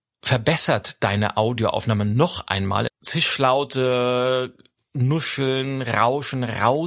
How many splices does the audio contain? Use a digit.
1